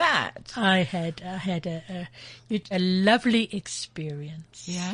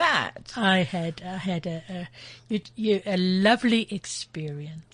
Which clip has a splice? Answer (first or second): first